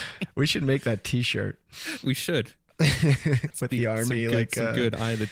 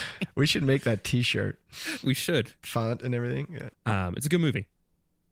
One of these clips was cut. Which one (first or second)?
second